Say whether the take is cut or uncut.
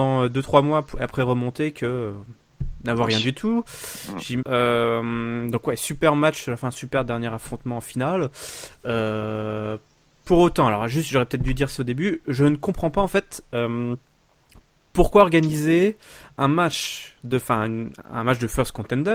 cut